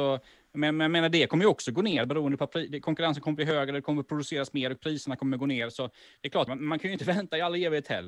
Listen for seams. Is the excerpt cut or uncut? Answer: cut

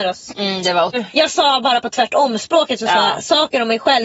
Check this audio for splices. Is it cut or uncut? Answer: cut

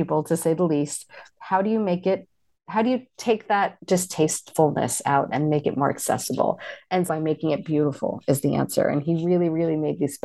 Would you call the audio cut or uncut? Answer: cut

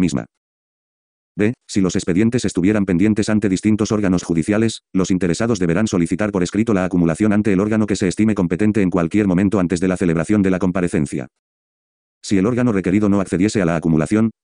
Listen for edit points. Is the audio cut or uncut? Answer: uncut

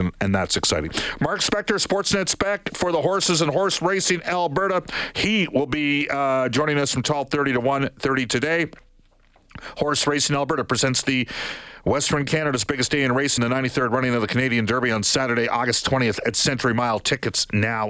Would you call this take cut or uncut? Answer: uncut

